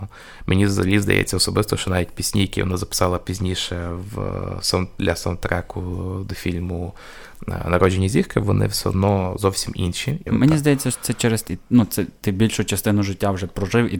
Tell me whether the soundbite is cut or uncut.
cut